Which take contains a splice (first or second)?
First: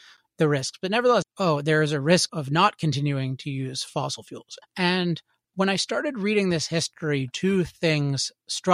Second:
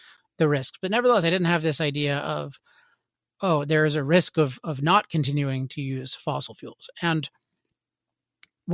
first